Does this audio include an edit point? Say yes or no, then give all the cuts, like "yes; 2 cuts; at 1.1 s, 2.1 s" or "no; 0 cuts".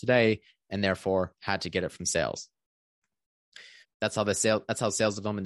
yes; 1 cut; at 3.8 s